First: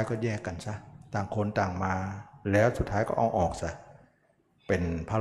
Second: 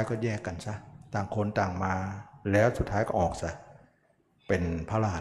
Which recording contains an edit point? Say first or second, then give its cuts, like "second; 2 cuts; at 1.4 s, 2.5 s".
second; 1 cut; at 3.1 s